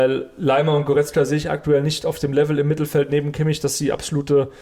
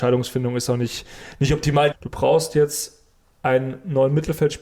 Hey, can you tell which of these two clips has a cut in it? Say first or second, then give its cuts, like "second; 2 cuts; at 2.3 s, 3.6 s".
second; 1 cut; at 1.9 s